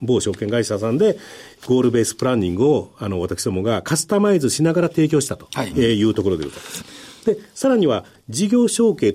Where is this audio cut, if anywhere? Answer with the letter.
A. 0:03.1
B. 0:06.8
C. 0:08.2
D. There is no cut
B